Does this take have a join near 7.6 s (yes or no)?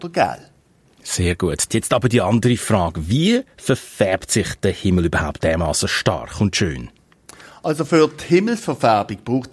no